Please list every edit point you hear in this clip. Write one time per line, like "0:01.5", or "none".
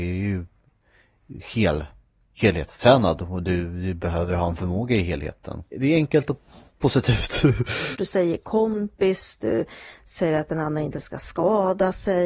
0:05.7
0:07.9